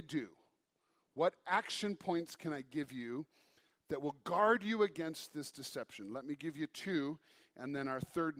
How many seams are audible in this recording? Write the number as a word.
zero